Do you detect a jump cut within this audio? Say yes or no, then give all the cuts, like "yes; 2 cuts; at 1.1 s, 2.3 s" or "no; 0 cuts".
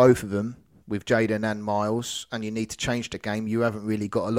no; 0 cuts